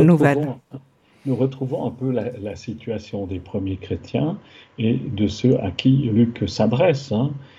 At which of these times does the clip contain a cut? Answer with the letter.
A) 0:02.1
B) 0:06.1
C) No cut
B